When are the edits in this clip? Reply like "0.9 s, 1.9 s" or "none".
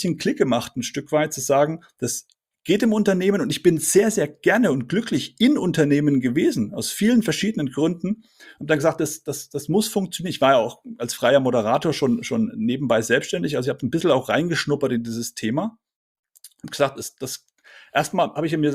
none